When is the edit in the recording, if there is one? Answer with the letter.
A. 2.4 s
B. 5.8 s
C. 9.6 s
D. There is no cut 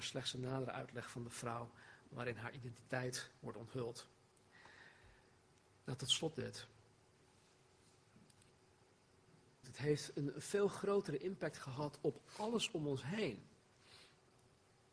C